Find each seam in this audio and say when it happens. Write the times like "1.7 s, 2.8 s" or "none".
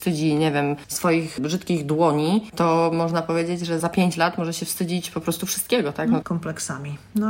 3.8 s, 6.2 s